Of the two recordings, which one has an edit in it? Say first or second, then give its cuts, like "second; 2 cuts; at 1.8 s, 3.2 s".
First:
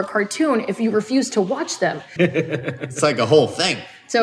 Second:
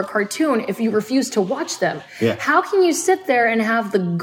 first; 1 cut; at 2.2 s